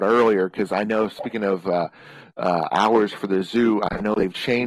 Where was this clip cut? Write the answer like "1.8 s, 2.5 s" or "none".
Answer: none